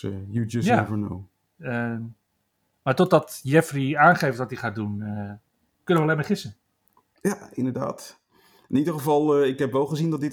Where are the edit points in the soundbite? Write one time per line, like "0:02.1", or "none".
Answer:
0:01.5

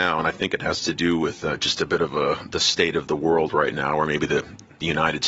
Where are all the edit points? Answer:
none

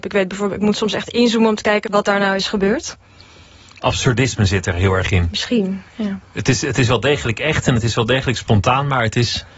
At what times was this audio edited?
0:01.8

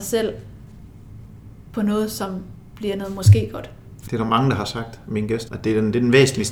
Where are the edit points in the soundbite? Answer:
0:04.1
0:05.5

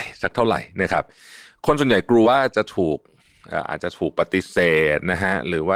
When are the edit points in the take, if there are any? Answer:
0:02.2

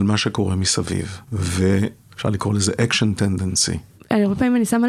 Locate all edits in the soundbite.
0:02.1

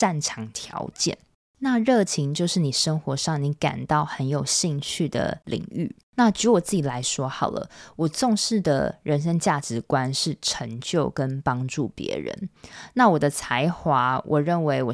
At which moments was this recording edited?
none

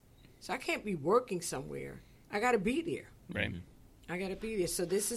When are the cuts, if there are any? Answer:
0:02.2

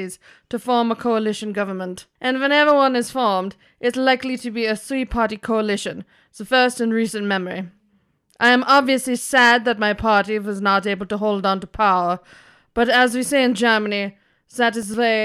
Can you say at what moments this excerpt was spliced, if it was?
none

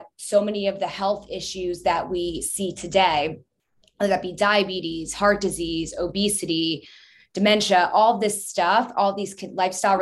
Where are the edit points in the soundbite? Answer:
none

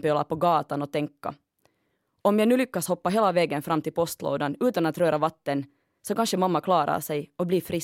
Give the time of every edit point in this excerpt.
none

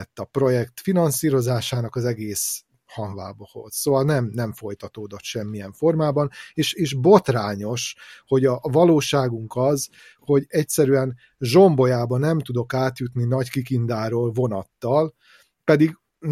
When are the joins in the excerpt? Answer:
0:06.7
0:10.2

